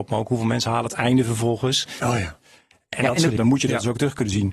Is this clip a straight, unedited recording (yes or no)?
no